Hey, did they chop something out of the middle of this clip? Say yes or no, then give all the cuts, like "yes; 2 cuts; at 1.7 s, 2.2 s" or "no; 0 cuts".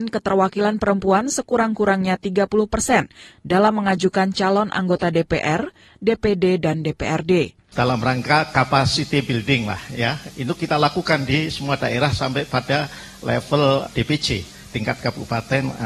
yes; 2 cuts; at 7.7 s, 10.3 s